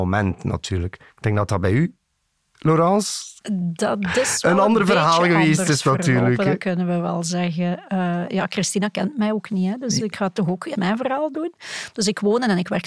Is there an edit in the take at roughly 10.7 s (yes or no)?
yes